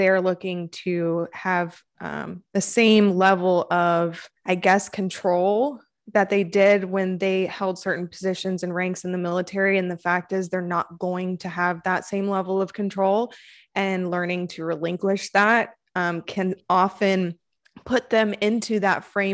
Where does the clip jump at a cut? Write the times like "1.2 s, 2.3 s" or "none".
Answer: 4.4 s